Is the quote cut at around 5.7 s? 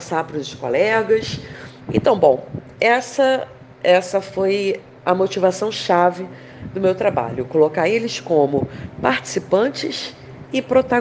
no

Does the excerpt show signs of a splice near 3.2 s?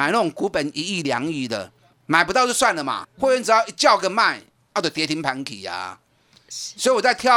yes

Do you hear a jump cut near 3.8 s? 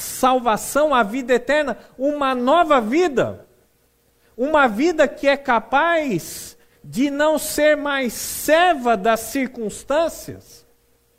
no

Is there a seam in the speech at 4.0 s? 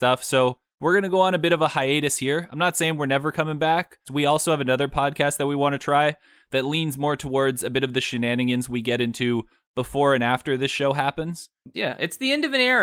yes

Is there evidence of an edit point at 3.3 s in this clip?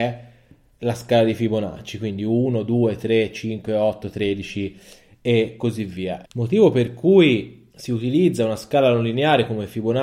no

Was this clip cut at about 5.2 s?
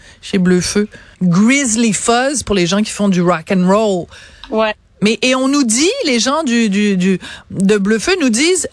yes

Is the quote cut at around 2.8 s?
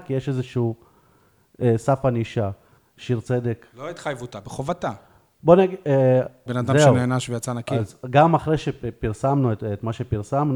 yes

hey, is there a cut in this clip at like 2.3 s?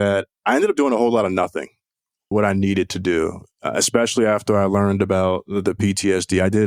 yes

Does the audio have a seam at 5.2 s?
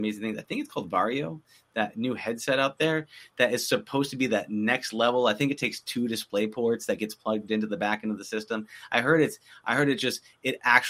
no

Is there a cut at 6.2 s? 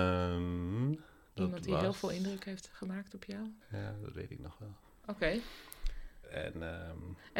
yes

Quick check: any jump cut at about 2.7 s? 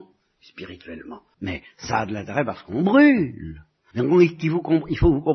no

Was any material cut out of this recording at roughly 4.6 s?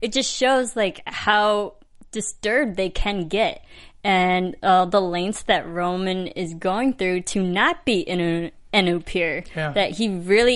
no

